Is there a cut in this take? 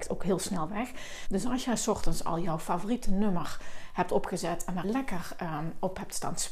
yes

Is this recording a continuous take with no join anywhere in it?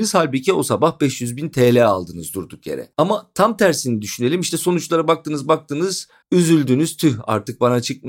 no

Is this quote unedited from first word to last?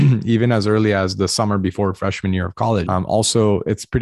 no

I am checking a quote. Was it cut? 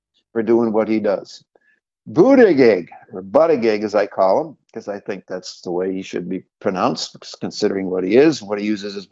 no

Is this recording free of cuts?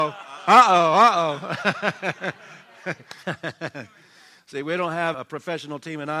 no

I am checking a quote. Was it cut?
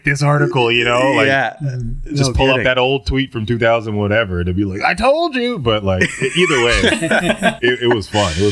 no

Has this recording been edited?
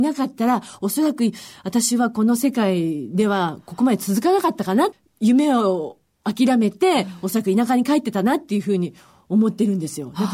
no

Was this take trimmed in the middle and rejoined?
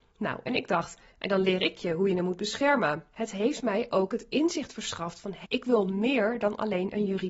yes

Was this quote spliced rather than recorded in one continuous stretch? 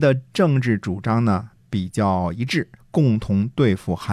yes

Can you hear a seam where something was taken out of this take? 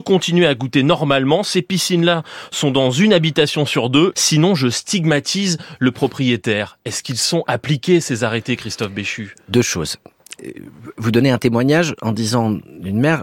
yes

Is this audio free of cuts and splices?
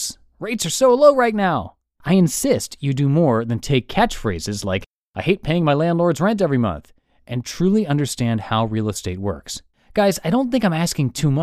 no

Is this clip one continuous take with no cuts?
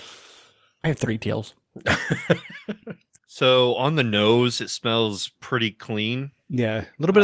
no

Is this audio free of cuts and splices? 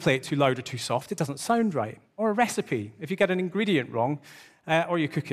yes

